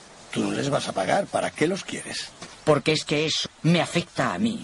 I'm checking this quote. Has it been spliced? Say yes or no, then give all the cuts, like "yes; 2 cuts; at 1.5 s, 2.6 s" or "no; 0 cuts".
yes; 1 cut; at 3.5 s